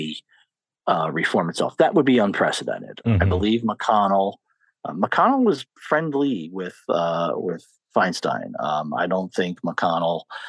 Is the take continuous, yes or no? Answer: no